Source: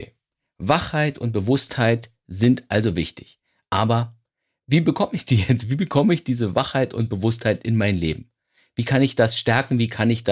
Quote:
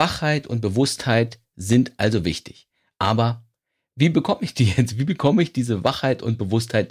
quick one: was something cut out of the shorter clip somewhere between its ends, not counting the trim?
no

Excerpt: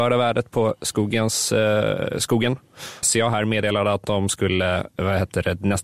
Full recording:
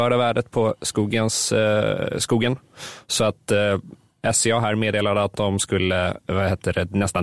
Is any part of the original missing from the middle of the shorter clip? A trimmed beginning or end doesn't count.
yes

